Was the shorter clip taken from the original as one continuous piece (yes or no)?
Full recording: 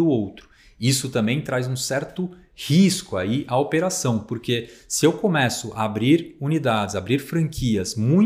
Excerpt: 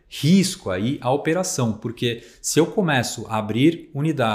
yes